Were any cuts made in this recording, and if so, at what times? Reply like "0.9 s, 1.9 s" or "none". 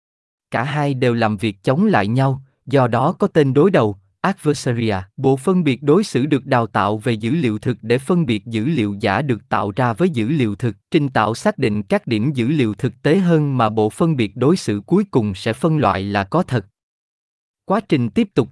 5.1 s, 10.8 s